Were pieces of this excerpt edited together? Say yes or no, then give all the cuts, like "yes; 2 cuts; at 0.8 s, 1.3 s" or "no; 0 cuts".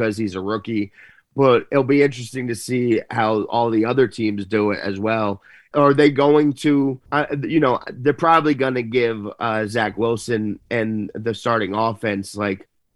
yes; 2 cuts; at 5.7 s, 7.1 s